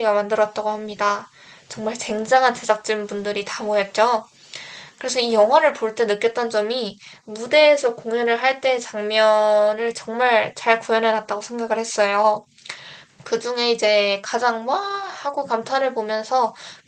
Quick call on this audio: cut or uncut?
cut